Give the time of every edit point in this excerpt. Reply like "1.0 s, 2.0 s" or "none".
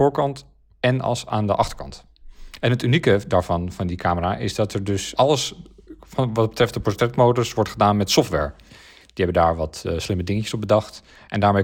5.1 s, 8.7 s

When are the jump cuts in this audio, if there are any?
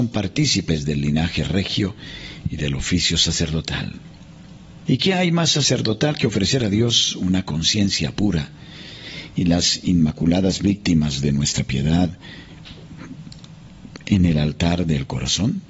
4.8 s

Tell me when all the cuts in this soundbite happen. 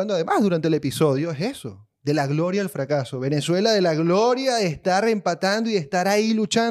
none

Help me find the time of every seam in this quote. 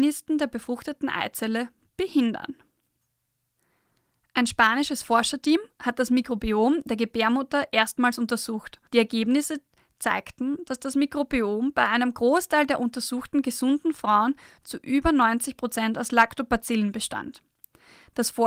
8.9 s

